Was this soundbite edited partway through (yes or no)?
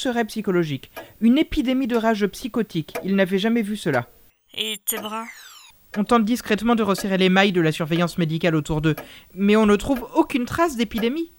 no